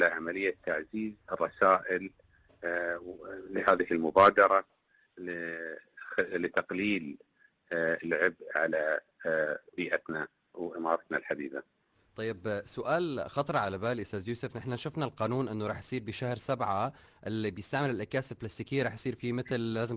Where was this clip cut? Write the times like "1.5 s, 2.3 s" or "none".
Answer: 1.2 s

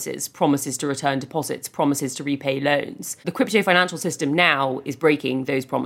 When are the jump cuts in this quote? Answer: 3.2 s

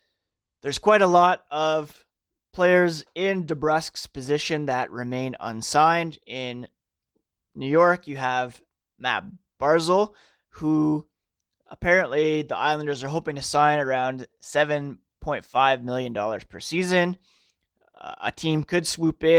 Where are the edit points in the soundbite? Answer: none

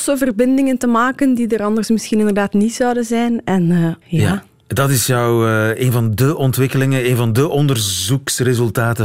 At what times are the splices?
4.0 s

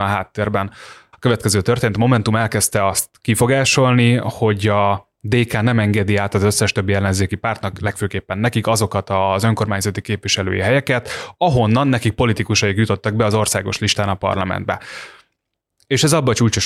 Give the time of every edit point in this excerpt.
1.1 s

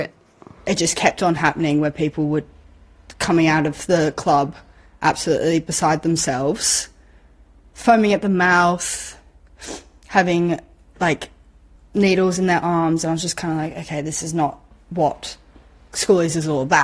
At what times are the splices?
11.8 s

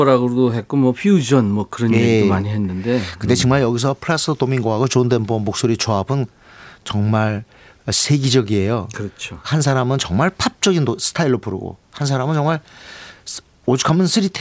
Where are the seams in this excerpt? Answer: none

